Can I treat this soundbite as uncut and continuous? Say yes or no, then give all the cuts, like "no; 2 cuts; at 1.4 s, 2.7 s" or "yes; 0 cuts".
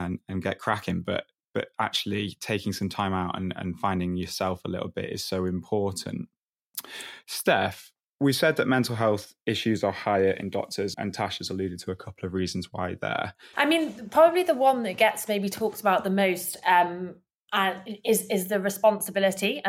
no; 2 cuts; at 10.9 s, 13.5 s